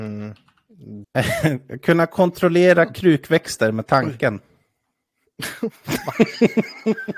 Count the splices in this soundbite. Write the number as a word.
one